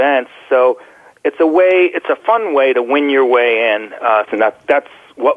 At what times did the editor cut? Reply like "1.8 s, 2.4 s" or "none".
4.3 s